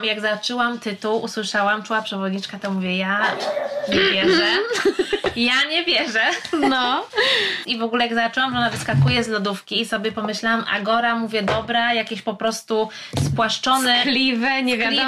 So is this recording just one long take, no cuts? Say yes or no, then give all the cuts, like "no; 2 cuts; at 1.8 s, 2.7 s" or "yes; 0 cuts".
no; 1 cut; at 7.6 s